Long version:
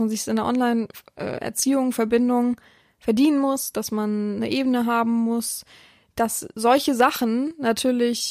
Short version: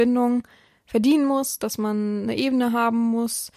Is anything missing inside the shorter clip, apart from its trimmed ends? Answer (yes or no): no